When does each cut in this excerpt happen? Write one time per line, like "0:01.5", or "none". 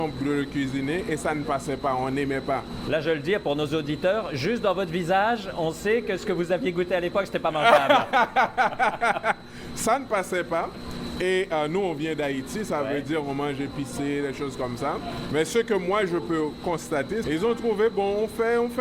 0:15.3
0:17.2